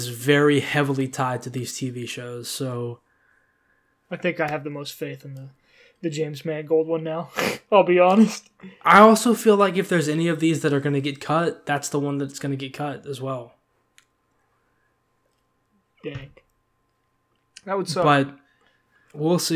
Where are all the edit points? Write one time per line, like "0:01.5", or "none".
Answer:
none